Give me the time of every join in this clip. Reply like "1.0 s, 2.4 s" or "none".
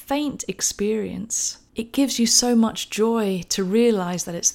1.7 s